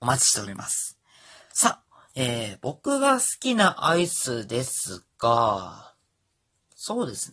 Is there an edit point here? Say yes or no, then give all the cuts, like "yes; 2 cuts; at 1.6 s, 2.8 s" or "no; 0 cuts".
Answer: no; 0 cuts